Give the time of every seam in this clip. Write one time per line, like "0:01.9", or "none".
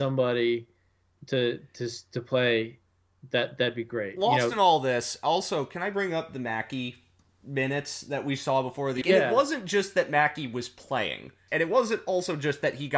0:01.1
0:09.0
0:11.5